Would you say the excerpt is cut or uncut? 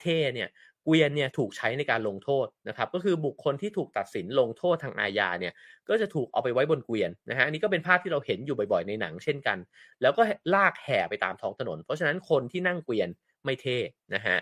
uncut